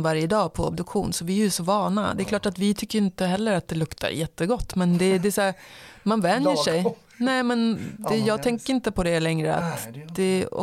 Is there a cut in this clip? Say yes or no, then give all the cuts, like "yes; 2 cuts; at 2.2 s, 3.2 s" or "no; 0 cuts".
no; 0 cuts